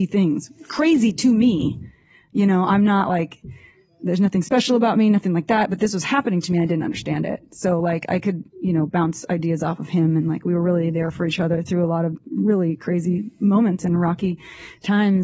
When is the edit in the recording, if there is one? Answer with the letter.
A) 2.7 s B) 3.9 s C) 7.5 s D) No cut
D